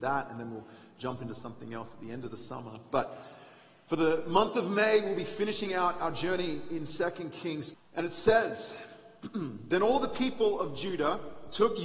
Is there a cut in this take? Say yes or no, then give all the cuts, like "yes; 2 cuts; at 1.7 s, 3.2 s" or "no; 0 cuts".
yes; 1 cut; at 7.7 s